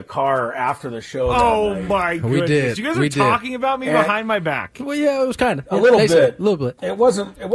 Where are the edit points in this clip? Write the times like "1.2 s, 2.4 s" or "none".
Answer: none